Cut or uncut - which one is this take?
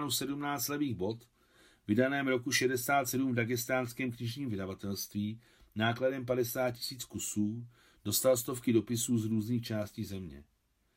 uncut